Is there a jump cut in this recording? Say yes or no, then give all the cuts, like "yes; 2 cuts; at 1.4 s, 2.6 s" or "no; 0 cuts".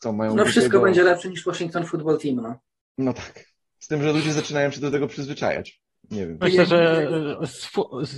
yes; 1 cut; at 6.4 s